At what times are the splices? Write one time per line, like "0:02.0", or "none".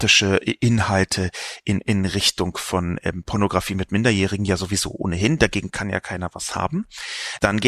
none